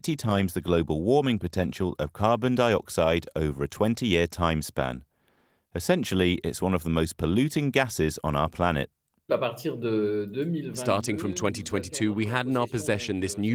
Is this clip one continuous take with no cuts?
yes; 0 cuts

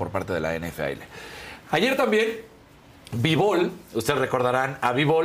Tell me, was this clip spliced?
no; 0 cuts

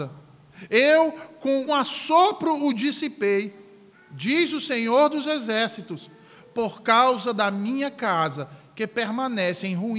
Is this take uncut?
no; 2 cuts; at 1.7 s, 3.9 s

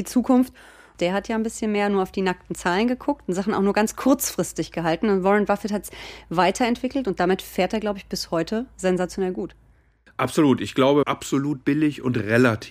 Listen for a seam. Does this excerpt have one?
yes; 2 cuts; at 1.0 s, 11.0 s

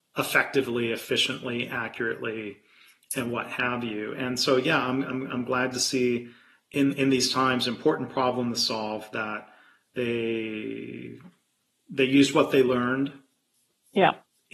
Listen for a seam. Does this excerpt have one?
no; 0 cuts

